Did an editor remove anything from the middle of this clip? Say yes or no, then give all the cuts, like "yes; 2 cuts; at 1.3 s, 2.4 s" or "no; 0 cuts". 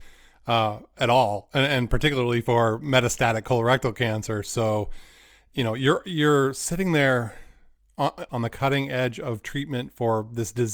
yes; 1 cut; at 8.3 s